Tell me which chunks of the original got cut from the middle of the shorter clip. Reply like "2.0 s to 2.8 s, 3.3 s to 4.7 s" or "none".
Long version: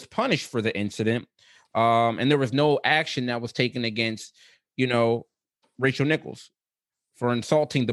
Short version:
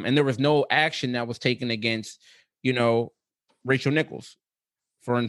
none